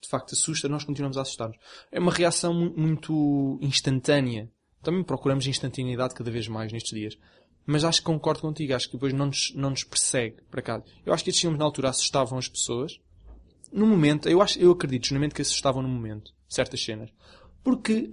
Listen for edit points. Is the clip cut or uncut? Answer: cut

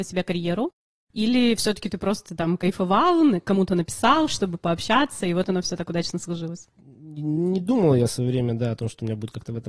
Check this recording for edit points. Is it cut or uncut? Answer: uncut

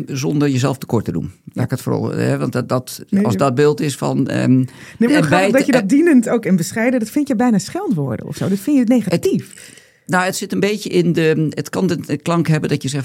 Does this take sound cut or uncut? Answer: cut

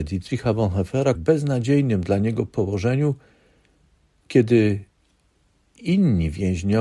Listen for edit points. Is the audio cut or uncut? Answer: cut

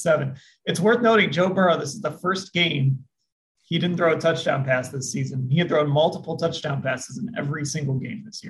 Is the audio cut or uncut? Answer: uncut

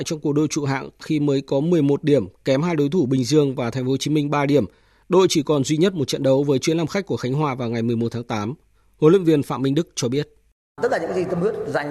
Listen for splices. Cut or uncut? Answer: uncut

